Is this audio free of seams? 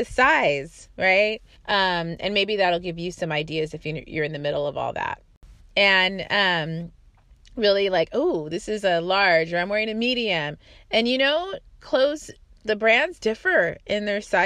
no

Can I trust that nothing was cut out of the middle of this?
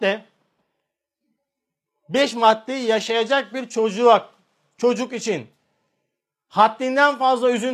yes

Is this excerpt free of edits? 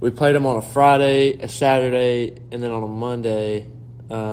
yes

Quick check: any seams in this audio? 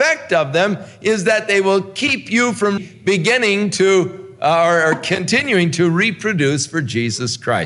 yes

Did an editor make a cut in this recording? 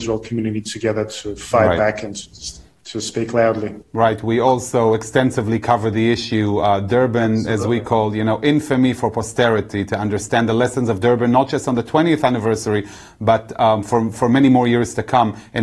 no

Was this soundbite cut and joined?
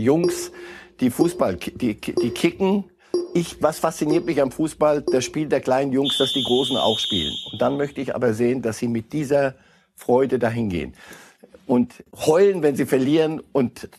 no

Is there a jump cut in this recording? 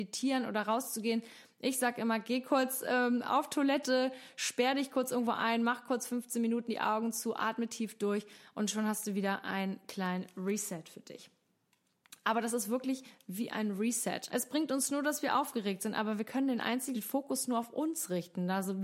yes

